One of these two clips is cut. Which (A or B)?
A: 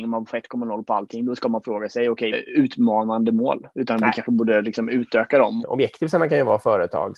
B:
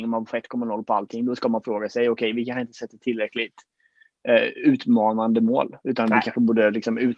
A